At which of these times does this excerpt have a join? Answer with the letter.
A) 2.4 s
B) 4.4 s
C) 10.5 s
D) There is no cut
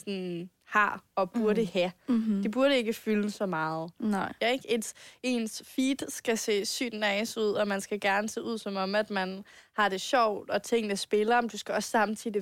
B